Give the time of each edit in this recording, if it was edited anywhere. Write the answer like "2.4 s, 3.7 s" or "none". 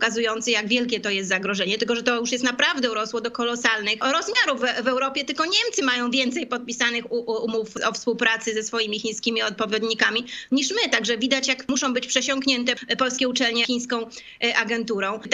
none